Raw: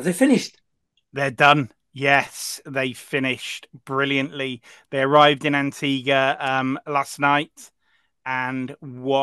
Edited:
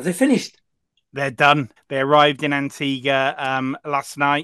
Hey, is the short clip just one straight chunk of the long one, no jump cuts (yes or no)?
no